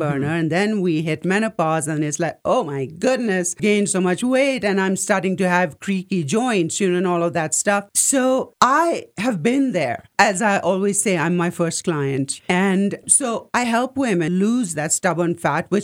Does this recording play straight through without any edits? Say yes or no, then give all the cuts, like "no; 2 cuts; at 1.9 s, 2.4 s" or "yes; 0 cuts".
yes; 0 cuts